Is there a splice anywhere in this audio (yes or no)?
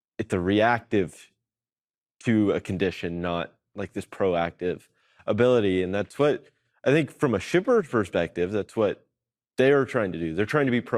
no